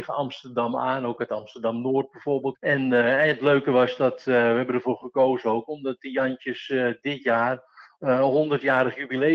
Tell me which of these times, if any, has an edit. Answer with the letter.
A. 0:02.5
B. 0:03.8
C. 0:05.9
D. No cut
A